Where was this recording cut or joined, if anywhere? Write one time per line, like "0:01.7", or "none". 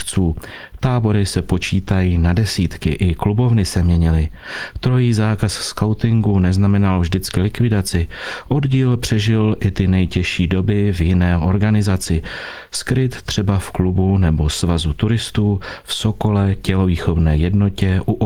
none